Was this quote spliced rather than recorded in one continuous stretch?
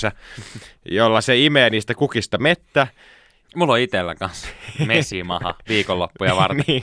yes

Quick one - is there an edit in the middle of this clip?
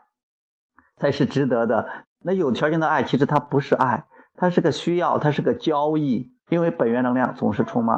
yes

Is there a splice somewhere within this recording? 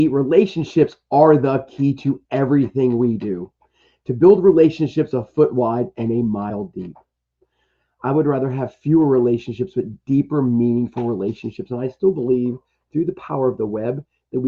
no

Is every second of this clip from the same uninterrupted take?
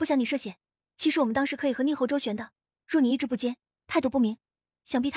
yes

